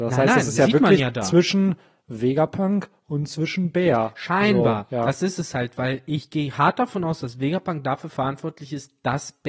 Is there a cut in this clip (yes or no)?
no